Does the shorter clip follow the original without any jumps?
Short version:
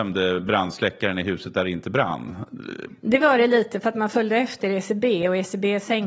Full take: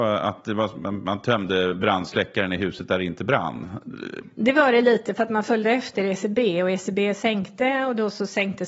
yes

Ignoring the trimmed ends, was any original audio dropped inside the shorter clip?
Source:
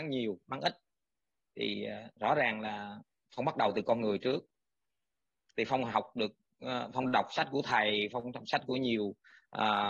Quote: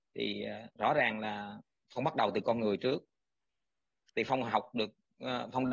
no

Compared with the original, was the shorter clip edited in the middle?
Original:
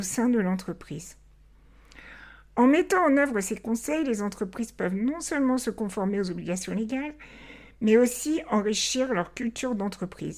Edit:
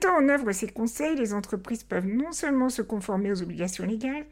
no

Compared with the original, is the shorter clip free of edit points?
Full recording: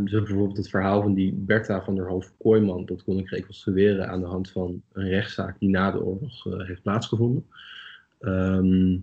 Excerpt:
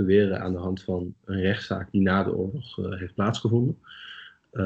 yes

